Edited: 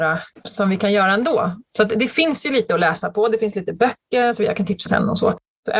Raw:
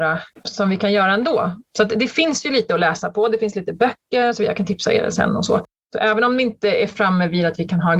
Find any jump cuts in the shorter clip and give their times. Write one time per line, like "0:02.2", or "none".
0:04.9